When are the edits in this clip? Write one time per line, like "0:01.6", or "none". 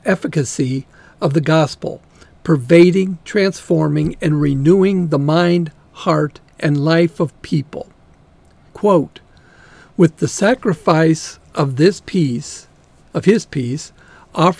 0:08.7